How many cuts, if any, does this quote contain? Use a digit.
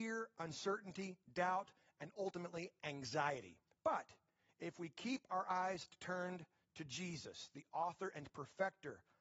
0